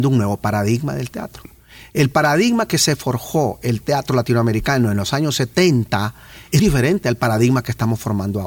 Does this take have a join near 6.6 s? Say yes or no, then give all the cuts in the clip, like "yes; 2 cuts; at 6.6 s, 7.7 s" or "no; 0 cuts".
yes; 1 cut; at 6.6 s